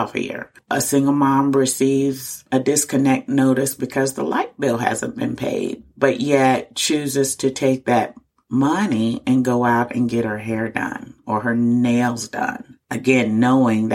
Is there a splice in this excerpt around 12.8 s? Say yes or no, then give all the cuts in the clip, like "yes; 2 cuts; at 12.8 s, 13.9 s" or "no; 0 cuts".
no; 0 cuts